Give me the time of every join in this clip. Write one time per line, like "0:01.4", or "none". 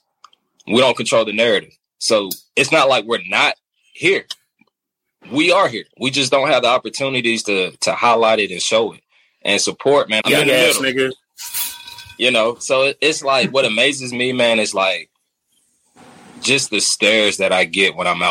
0:05.9
0:10.2